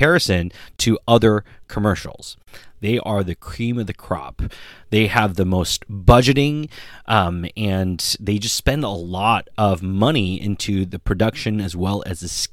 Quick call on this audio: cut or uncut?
cut